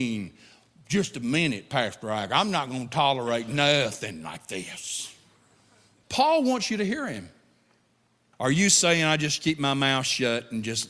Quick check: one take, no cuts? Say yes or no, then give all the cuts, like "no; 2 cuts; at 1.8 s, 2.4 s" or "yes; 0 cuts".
no; 2 cuts; at 6.0 s, 8.3 s